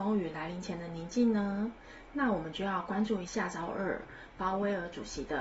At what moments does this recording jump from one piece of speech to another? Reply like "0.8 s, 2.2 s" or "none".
3.3 s